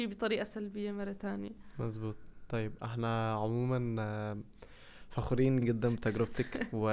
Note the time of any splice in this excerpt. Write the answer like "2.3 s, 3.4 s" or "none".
5.6 s